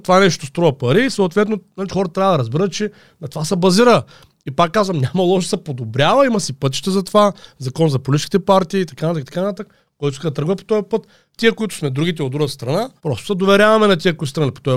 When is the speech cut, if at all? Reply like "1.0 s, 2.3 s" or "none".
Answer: 13.0 s